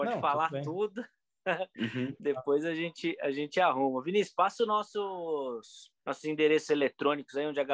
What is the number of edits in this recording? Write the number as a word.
one